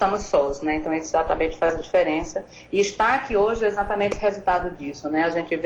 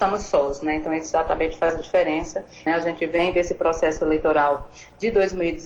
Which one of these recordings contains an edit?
second; 1 cut; at 2.7 s

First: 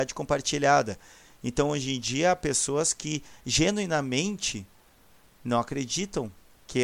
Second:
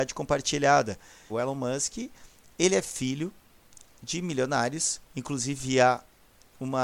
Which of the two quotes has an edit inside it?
second; 2 cuts; at 1.3 s, 5.1 s

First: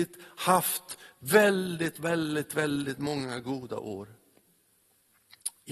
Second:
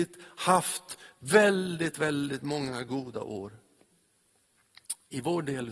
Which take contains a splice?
second; 1 cut; at 1.9 s

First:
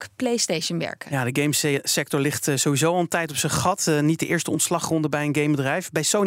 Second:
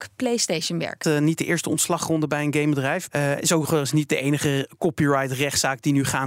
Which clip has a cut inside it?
second; 2 cuts; at 1.0 s, 3.1 s

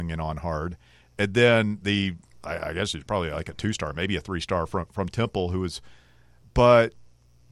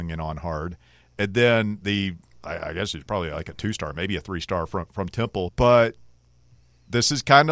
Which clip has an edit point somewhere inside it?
second; 1 cut; at 5.5 s

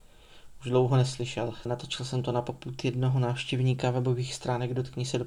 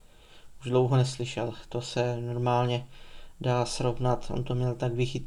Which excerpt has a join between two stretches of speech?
first; 1 cut; at 1.7 s

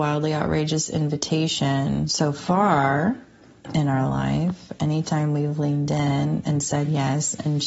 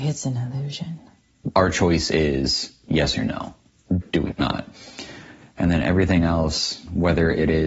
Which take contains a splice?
second; 2 cuts; at 1.5 s, 4.0 s

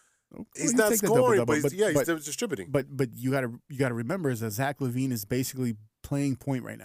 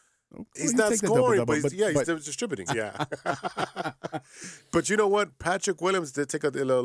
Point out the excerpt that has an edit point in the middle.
second; 1 cut; at 2.7 s

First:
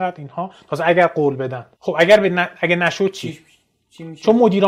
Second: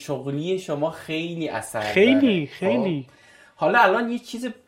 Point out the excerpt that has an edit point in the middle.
first; 1 cut; at 1.7 s

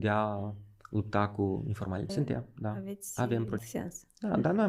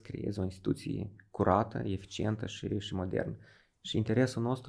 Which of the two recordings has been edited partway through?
first; 2 cuts; at 2.1 s, 3.6 s

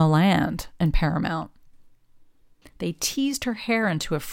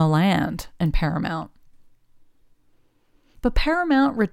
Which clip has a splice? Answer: first; 1 cut; at 2.6 s

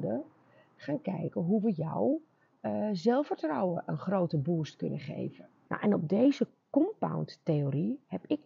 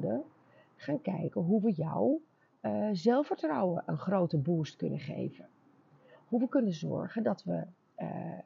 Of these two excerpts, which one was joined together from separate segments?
first; 1 cut; at 5.7 s

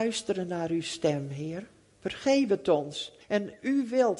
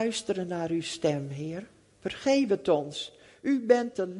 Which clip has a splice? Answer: first; 1 cut; at 3.2 s

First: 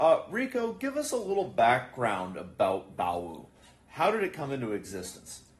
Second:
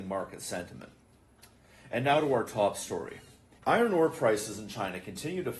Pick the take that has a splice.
second; 1 cut; at 3.6 s

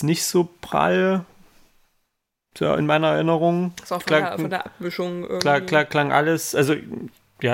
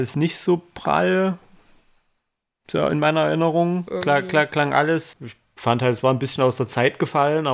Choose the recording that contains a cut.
second; 2 cuts; at 3.9 s, 5.1 s

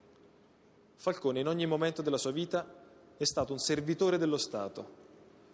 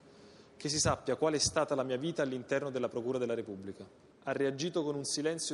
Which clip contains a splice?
second; 1 cut; at 4.1 s

